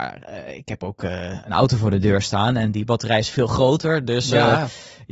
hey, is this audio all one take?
yes; 0 cuts

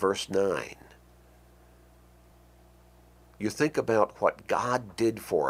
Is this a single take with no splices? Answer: yes; 0 cuts

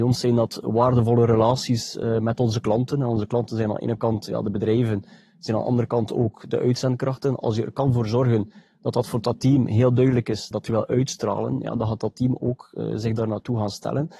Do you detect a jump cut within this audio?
yes; 1 cut; at 10.5 s

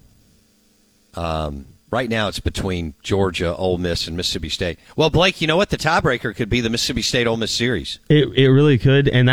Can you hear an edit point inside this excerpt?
no; 0 cuts

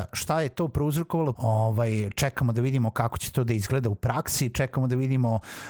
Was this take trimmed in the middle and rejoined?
yes; 1 cut; at 1.3 s

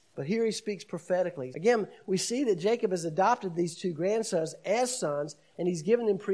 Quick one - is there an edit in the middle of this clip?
yes; 1 cut; at 1.5 s

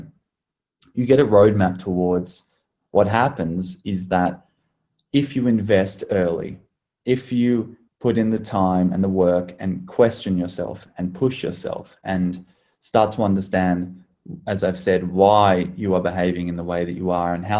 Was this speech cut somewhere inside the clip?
yes; 1 cut; at 2.8 s

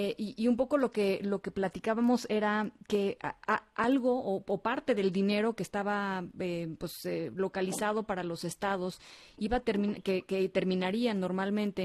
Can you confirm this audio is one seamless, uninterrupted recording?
yes; 0 cuts

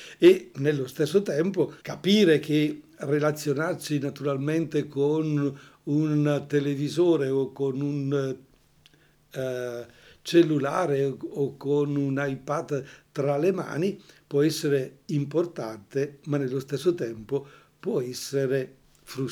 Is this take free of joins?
no; 1 cut; at 1.8 s

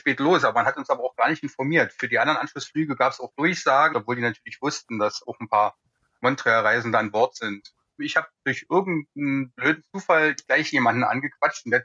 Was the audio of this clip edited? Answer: yes; 2 cuts; at 3.9 s, 8.0 s

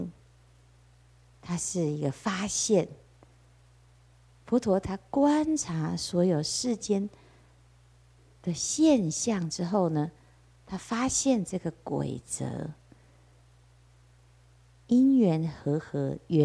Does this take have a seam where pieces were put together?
no; 0 cuts

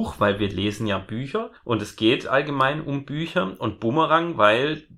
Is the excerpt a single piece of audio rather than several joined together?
yes; 0 cuts

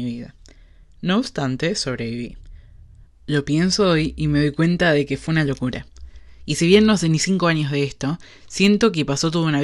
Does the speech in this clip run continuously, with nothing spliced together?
no; 1 cut; at 3.0 s

